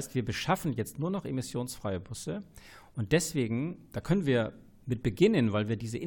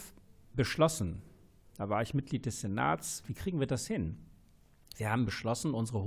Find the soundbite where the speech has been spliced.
second; 1 cut; at 3.2 s

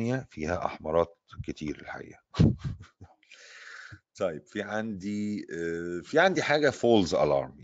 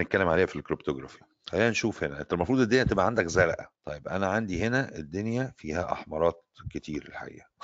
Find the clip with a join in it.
second; 1 cut; at 3.7 s

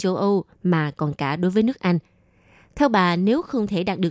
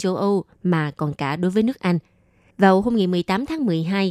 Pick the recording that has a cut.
second; 1 cut; at 2.5 s

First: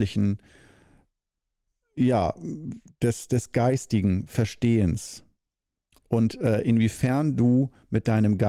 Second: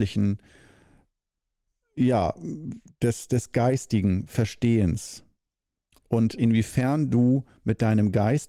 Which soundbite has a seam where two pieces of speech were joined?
second; 1 cut; at 6.4 s

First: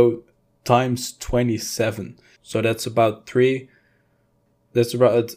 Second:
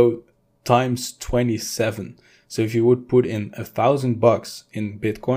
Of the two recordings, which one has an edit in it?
first; 1 cut; at 2.4 s

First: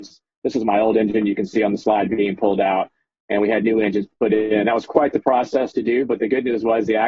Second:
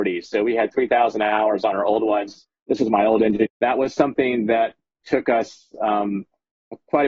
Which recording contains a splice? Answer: second; 2 cuts; at 3.5 s, 5.0 s

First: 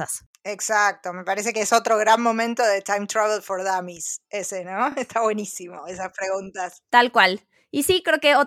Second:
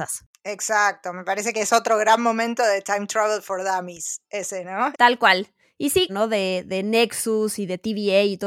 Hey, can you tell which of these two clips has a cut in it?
second; 2 cuts; at 4.9 s, 6.1 s

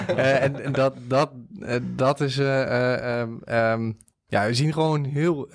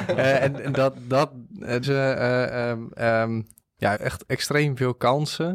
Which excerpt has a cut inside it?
second; 2 cuts; at 1.8 s, 3.9 s

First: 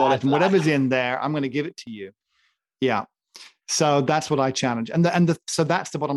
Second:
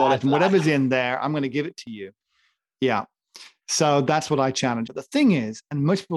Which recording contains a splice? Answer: second; 1 cut; at 4.9 s

